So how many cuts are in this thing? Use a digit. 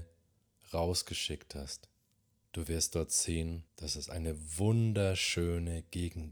2